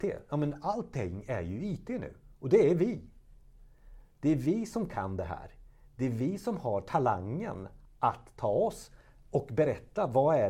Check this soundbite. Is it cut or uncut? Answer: uncut